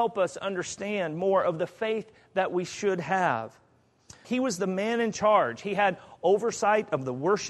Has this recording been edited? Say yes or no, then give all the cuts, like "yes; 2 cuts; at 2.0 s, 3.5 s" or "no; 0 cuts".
yes; 1 cut; at 4.2 s